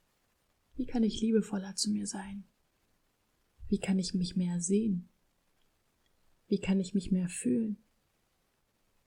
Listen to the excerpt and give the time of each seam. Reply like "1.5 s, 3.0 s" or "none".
none